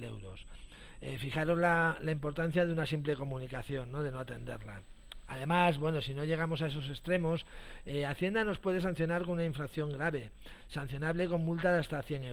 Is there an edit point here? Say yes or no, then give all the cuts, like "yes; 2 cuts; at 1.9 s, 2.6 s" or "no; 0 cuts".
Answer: no; 0 cuts